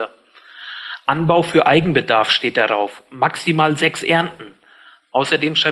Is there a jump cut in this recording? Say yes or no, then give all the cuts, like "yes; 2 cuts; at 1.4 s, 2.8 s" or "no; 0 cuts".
no; 0 cuts